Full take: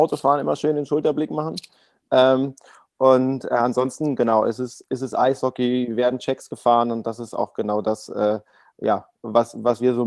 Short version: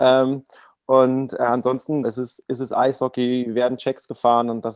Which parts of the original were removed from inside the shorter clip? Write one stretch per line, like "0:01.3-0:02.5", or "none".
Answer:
0:04.1-0:04.4